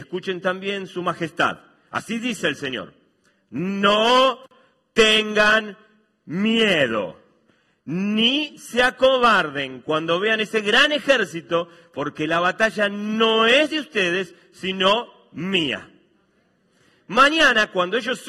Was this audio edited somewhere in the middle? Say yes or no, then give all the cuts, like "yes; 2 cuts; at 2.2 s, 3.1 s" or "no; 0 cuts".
no; 0 cuts